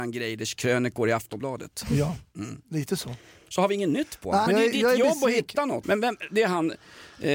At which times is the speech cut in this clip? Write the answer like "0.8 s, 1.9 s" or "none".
4.5 s, 5.8 s